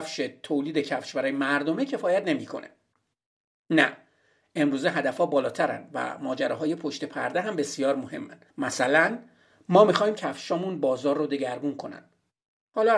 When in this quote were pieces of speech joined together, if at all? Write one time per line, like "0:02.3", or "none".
0:08.5